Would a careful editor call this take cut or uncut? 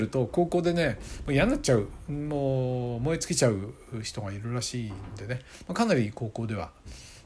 uncut